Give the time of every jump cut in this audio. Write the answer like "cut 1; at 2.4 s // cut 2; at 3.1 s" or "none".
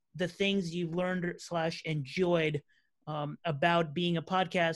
none